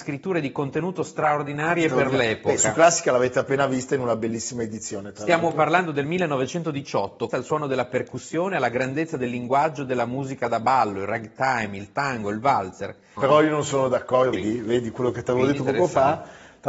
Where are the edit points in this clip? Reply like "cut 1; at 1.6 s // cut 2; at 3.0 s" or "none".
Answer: cut 1; at 7.3 s // cut 2; at 13.2 s // cut 3; at 14.3 s